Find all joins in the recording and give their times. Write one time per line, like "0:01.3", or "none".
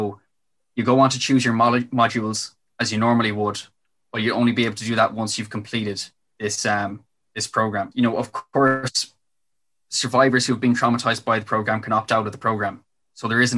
0:07.9